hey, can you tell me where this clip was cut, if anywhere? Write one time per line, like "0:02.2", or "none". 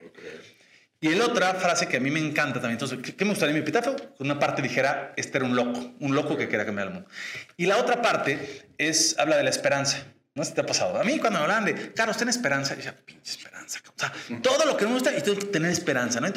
0:10.4